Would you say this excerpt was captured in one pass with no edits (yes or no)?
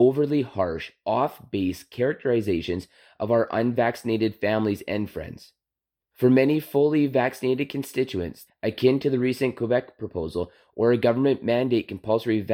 no